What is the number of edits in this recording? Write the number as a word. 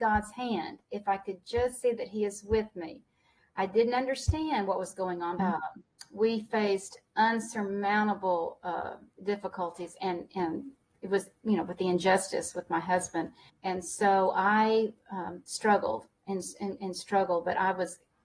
two